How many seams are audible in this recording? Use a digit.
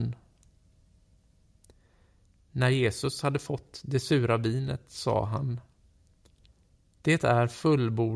0